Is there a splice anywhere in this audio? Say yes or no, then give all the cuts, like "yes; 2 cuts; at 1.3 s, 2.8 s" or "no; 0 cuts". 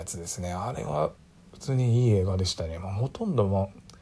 no; 0 cuts